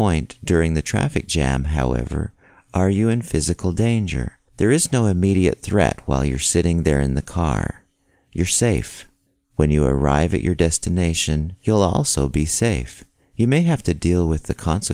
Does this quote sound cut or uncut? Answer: uncut